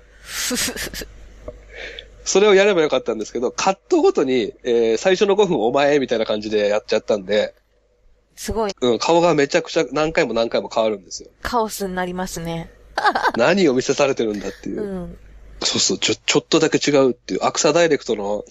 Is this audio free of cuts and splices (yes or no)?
no